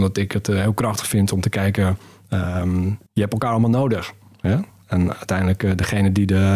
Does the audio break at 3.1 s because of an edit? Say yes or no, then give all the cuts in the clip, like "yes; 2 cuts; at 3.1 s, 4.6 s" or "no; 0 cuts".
yes; 1 cut; at 3.1 s